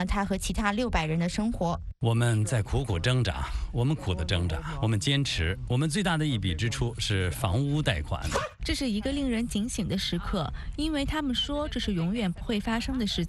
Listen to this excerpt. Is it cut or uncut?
cut